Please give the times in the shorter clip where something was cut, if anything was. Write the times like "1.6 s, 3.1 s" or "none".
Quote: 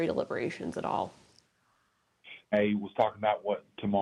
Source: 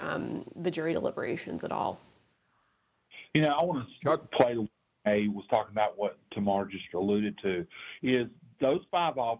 2.4 s